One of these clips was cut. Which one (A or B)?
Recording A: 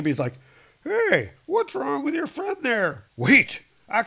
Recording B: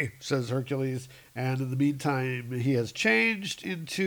A